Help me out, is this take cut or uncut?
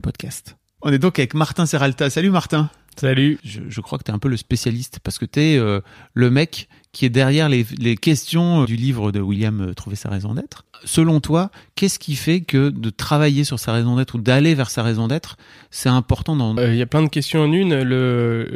cut